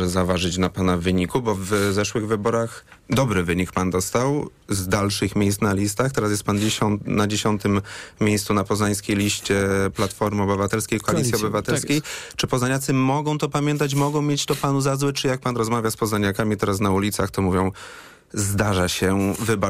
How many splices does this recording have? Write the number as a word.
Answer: one